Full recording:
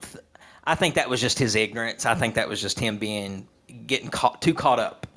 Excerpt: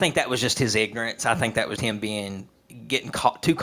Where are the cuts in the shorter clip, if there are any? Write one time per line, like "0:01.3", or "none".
0:01.8